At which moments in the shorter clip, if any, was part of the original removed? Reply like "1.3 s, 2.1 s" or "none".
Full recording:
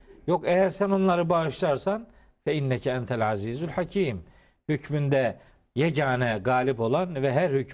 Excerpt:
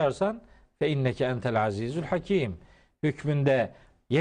none